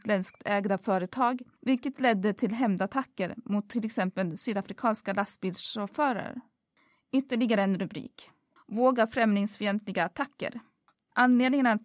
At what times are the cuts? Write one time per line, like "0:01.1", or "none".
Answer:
0:10.9